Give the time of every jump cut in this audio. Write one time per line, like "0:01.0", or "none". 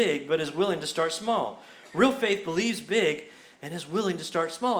none